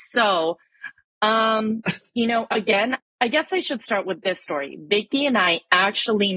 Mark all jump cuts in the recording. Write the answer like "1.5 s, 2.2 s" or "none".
3.0 s